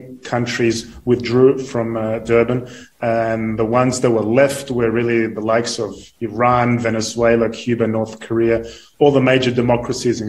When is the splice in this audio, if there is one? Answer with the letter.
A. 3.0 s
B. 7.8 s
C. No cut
C